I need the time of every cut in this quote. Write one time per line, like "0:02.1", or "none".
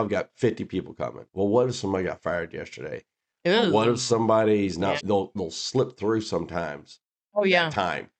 0:05.0